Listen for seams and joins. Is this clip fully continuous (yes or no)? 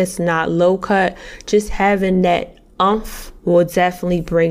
no